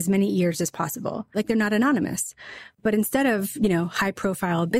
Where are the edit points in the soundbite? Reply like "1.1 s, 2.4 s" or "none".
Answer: 1.3 s